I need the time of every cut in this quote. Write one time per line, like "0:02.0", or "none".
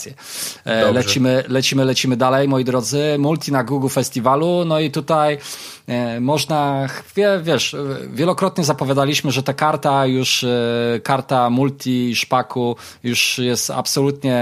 none